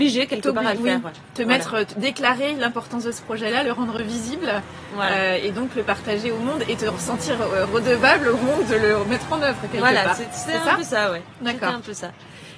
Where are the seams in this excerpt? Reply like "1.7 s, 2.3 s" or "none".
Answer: none